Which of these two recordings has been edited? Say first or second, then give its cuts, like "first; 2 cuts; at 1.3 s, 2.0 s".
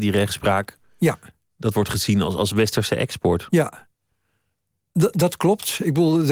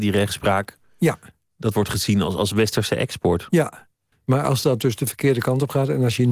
second; 1 cut; at 4.1 s